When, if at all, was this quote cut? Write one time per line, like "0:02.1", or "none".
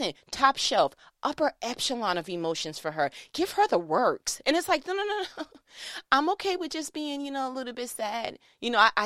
none